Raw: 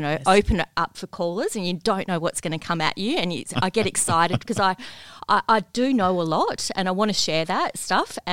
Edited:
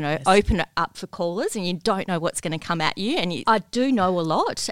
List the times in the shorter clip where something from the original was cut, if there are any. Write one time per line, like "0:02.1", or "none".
0:03.4